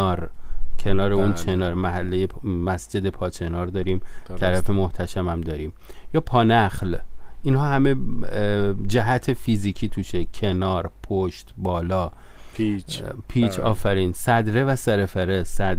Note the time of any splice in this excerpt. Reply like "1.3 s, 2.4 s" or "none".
none